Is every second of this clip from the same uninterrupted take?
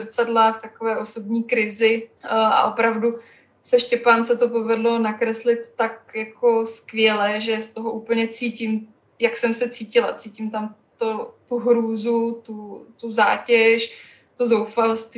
no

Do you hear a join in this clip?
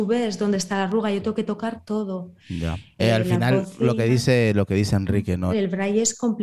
yes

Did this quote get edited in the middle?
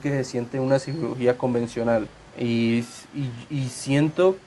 yes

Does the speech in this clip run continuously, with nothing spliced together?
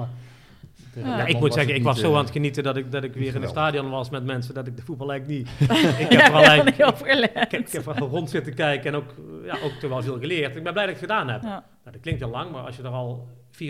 no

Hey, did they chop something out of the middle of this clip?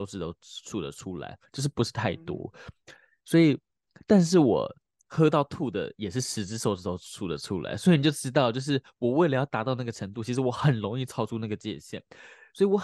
no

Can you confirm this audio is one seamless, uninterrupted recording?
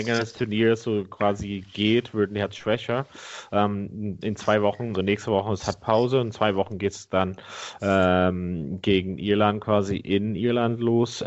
no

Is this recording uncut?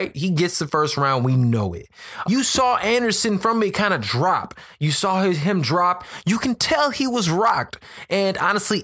no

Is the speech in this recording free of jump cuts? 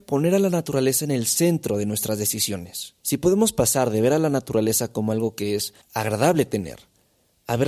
no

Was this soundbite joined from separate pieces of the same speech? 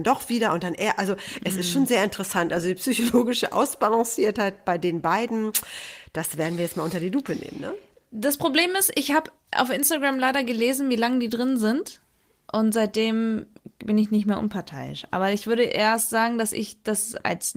no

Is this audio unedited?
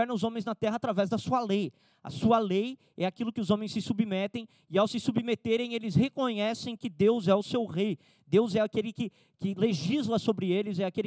yes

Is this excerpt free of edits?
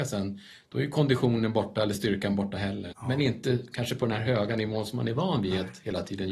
no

